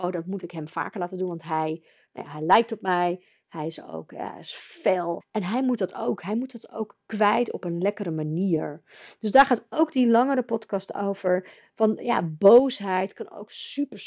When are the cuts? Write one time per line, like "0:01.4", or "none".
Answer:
0:05.2